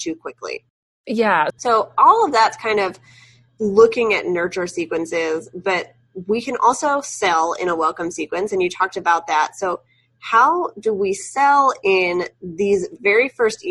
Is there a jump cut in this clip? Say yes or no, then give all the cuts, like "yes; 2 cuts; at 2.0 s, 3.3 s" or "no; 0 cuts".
yes; 1 cut; at 1.5 s